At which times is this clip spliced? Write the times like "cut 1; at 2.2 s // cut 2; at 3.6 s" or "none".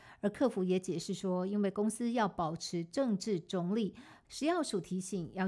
cut 1; at 4.2 s